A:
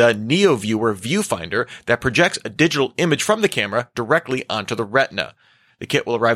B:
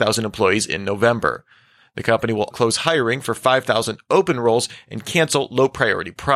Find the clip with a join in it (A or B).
B